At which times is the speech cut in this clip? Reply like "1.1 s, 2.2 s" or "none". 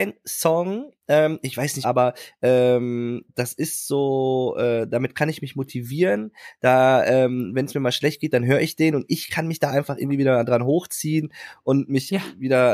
1.8 s